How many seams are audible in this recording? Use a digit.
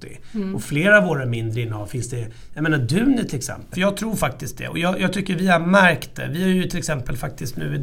1